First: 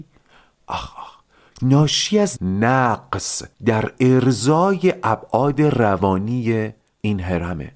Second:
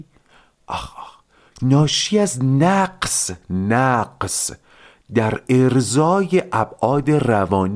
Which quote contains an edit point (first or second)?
first